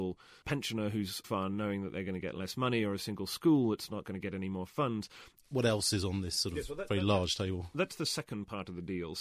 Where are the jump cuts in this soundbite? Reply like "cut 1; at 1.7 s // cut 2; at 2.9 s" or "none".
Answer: cut 1; at 1.2 s // cut 2; at 5.4 s